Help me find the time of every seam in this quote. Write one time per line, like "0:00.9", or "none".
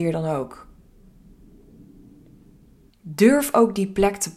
0:02.9